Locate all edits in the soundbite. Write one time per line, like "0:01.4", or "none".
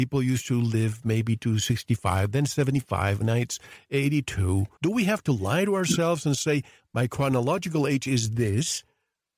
0:04.8

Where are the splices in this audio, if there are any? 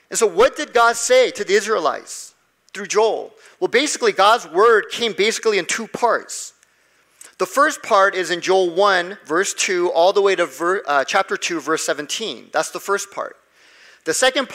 none

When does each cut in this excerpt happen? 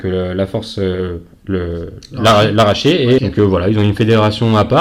0:03.2

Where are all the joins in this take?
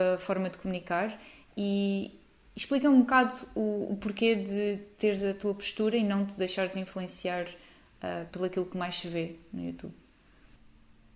0:08.3

